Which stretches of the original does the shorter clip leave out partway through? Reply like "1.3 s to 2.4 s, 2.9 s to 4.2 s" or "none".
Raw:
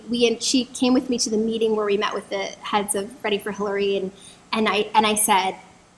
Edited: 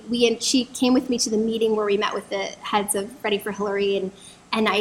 none